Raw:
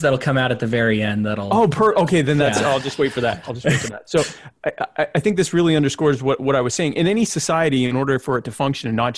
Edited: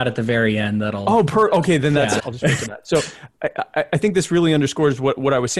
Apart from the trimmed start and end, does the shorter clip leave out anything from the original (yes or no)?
yes